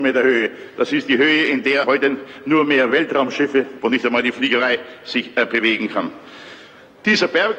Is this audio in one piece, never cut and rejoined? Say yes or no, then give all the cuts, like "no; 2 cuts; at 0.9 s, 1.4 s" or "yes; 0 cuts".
no; 2 cuts; at 1.8 s, 3.8 s